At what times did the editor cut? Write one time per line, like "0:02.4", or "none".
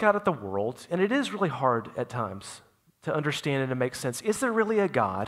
none